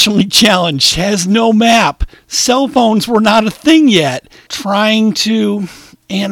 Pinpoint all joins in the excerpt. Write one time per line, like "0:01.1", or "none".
0:04.5